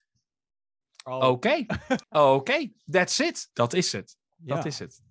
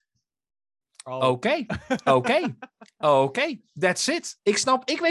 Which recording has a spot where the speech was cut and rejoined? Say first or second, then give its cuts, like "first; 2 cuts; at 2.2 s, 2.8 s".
first; 2 cuts; at 2.0 s, 3.5 s